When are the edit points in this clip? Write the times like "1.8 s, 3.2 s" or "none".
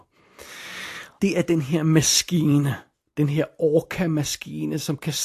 1.2 s